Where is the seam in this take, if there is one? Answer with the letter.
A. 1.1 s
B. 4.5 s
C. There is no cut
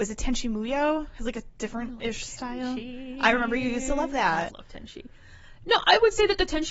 B